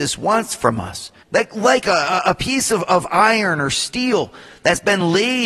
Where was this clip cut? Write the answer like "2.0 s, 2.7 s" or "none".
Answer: 1.2 s